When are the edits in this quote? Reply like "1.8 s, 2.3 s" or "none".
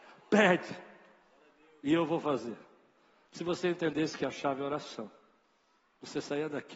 3.2 s